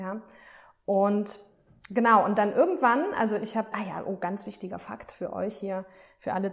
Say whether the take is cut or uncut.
cut